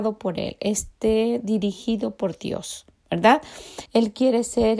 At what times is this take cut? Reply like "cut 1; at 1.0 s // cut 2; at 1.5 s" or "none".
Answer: cut 1; at 3.9 s